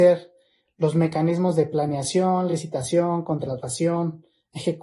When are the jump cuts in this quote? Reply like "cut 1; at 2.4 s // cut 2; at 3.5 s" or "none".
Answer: none